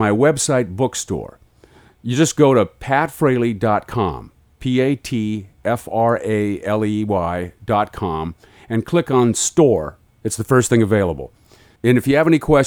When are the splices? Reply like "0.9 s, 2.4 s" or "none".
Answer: 11.8 s